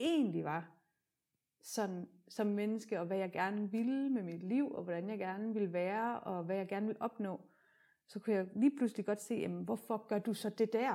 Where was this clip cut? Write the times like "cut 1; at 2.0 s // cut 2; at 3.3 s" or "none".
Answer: none